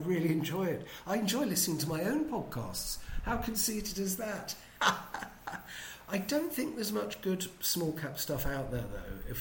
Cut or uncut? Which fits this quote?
uncut